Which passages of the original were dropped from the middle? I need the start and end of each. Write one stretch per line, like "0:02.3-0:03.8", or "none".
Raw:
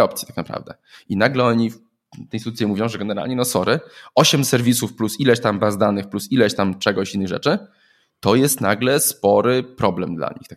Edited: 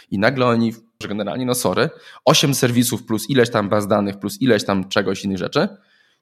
0:02.0-0:02.9

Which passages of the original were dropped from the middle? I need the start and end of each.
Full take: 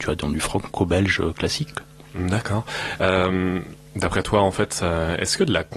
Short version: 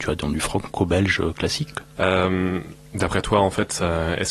0:02.0-0:03.0

